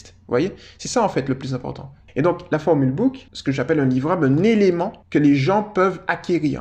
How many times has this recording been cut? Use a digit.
3